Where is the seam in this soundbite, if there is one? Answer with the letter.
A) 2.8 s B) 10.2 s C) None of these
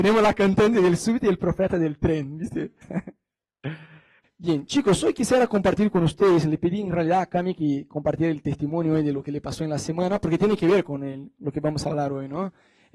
A